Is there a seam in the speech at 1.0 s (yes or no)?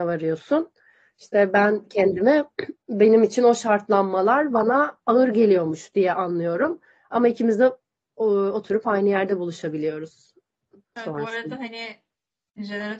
no